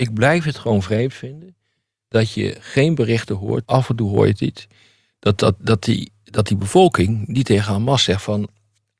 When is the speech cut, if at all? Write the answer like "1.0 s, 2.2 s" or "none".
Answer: 3.6 s